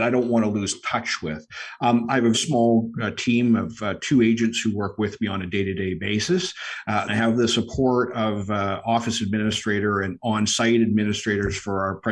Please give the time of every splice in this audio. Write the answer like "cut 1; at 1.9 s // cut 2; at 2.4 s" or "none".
cut 1; at 2.3 s // cut 2; at 7.1 s